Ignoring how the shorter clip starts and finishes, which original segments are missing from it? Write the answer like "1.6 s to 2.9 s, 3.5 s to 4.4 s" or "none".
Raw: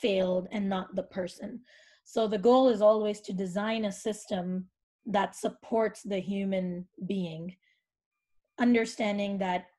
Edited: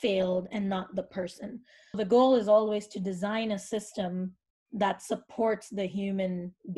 1.9 s to 2.3 s